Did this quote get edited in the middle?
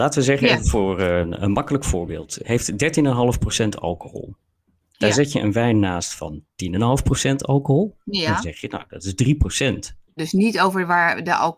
yes; 2 cuts; at 2.4 s, 10.2 s

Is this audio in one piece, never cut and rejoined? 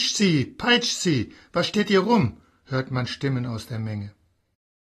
yes; 0 cuts

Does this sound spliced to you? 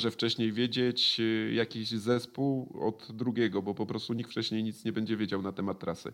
no; 0 cuts

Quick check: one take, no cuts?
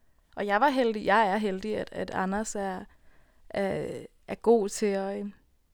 yes; 0 cuts

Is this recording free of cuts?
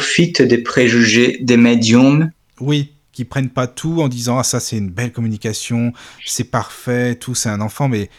no; 1 cut; at 3.0 s

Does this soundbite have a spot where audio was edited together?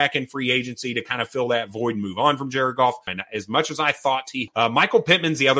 yes; 2 cuts; at 3.1 s, 4.5 s

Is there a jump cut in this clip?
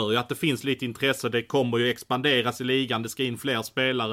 no; 0 cuts

